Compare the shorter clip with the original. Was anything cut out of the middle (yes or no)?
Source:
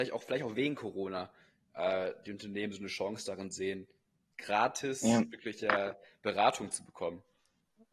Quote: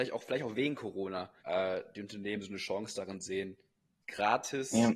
yes